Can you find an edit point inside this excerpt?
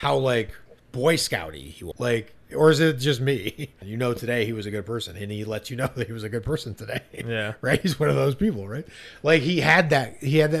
yes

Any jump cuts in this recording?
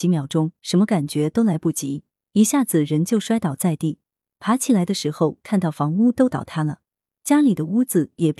no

